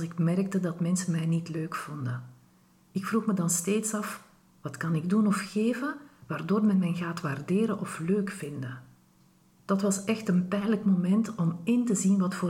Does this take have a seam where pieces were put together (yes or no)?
no